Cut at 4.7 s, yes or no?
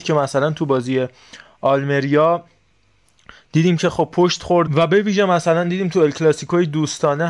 yes